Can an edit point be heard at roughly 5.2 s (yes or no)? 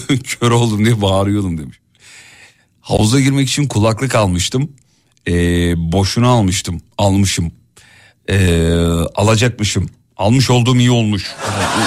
no